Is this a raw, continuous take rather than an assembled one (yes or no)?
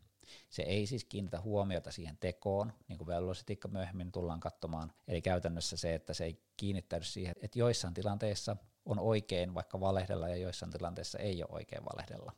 no